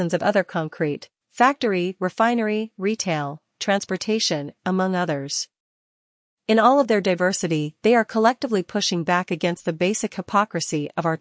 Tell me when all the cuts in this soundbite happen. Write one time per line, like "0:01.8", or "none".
0:04.6